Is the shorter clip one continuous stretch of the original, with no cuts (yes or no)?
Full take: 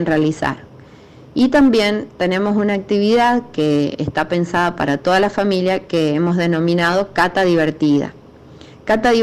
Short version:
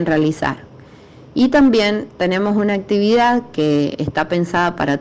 yes